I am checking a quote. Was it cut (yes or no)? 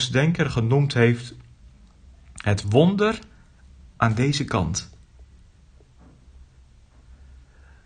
no